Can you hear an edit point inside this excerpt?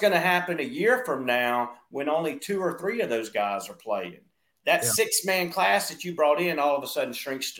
no; 0 cuts

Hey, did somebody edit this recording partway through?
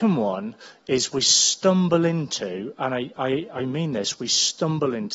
no; 0 cuts

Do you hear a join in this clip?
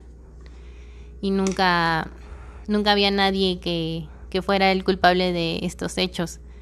no; 0 cuts

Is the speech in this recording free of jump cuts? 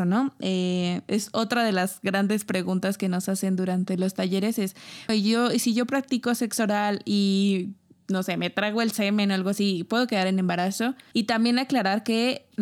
no; 2 cuts; at 5.1 s, 11.1 s

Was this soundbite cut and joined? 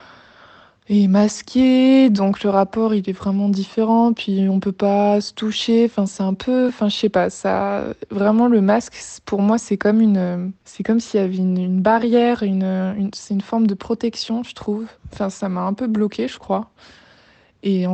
no; 0 cuts

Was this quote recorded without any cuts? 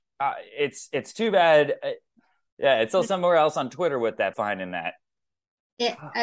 no; 2 cuts; at 2.5 s, 4.3 s

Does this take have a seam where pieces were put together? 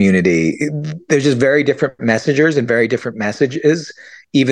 no; 0 cuts

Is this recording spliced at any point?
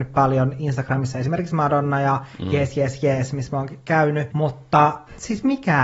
no; 0 cuts

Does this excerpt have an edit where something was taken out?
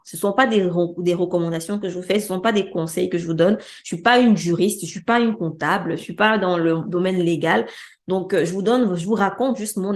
no; 0 cuts

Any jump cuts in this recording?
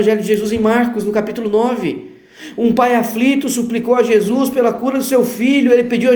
no; 0 cuts

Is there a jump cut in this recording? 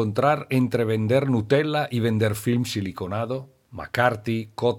yes; 1 cut; at 3.7 s

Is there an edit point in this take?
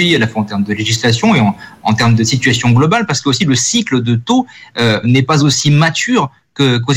yes; 1 cut; at 5.0 s

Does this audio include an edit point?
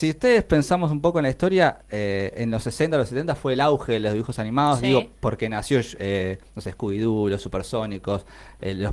no; 0 cuts

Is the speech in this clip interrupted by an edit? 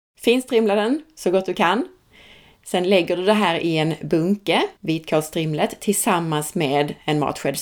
yes; 1 cut; at 4.8 s

